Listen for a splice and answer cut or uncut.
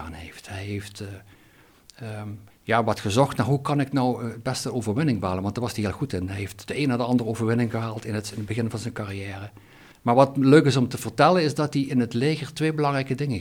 cut